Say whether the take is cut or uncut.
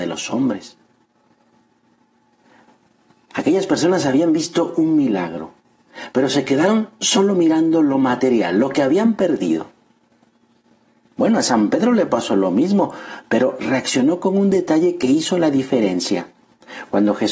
uncut